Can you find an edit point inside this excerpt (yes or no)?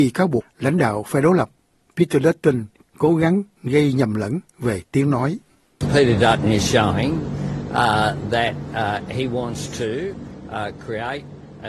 no